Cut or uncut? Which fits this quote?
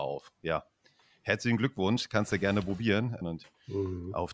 cut